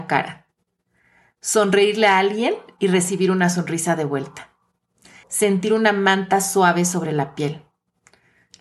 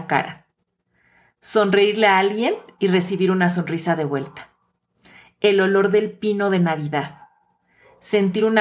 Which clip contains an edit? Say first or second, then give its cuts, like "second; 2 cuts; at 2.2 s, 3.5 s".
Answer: first; 1 cut; at 5.2 s